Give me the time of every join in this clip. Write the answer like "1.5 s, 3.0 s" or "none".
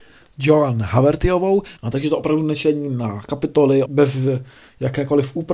1.8 s, 3.9 s